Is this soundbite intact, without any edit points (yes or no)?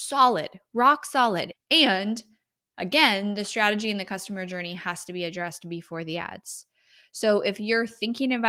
no